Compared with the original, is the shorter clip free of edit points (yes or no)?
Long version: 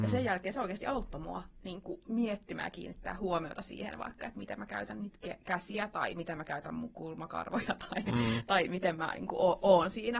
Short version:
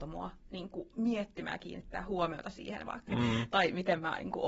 no